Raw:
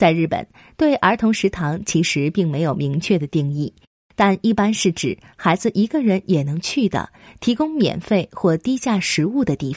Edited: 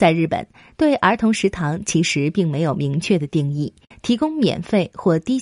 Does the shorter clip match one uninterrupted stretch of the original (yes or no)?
no